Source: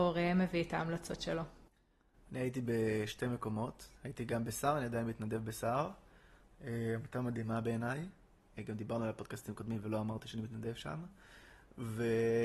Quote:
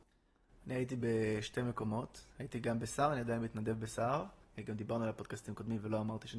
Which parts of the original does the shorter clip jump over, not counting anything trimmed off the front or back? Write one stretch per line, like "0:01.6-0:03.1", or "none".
0:06.1-0:08.4